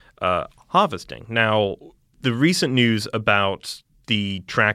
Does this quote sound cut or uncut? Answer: uncut